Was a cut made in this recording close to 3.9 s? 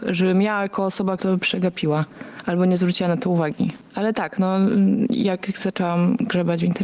no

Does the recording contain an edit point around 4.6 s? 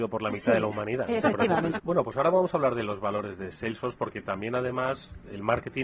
no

